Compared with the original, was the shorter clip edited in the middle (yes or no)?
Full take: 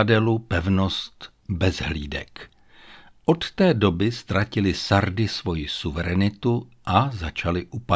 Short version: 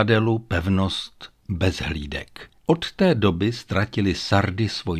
yes